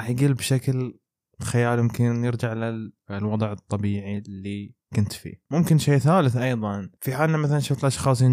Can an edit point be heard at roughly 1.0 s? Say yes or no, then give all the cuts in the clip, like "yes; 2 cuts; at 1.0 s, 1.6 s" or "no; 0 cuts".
no; 0 cuts